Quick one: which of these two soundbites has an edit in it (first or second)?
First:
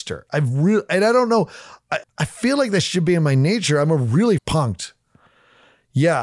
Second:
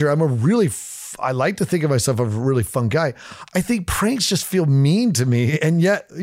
first